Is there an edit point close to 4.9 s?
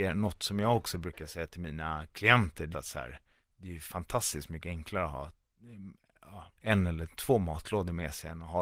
no; 1 cut; at 2.7 s

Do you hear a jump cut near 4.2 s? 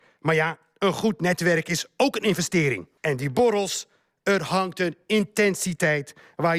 no; 1 cut; at 3.0 s

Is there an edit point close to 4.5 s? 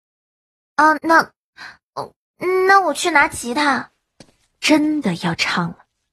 no; 1 cut; at 1.0 s

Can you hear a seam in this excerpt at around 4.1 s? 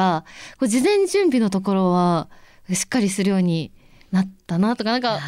no; 0 cuts

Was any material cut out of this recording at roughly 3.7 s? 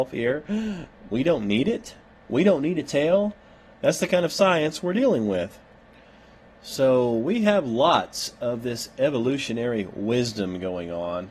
yes; 1 cut; at 3.7 s

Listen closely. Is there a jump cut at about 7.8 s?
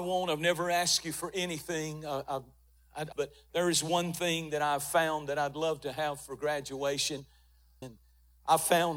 yes; 2 cuts; at 3.1 s, 7.8 s

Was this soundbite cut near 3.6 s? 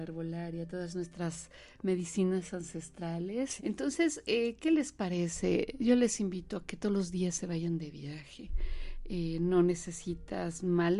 yes; 1 cut; at 3.6 s

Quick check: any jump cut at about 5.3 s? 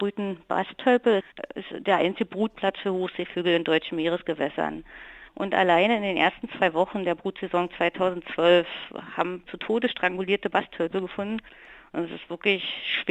yes; 2 cuts; at 5.3 s, 9.5 s

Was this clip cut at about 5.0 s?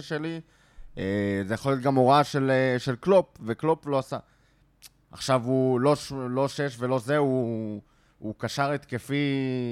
yes; 1 cut; at 5.0 s

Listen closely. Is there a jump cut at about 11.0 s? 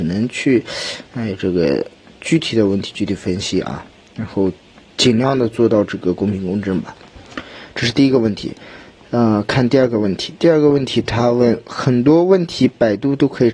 no; 0 cuts

